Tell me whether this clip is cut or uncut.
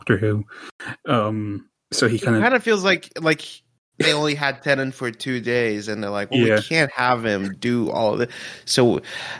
uncut